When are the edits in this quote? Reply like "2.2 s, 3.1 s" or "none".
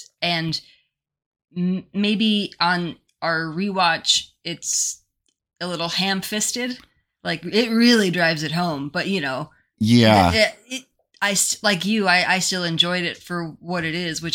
none